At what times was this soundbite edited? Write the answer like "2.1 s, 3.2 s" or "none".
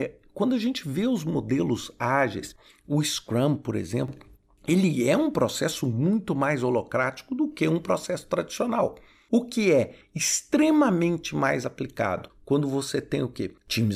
none